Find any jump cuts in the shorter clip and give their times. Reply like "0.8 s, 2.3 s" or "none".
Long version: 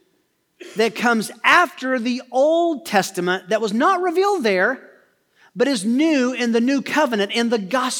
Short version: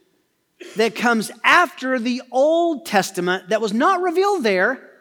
none